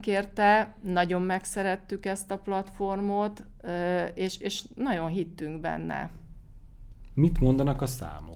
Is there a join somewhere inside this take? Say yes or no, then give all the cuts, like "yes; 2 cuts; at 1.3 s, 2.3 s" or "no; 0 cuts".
no; 0 cuts